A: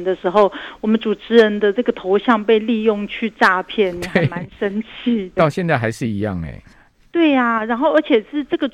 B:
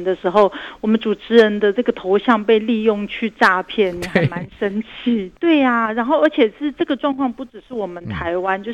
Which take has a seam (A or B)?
B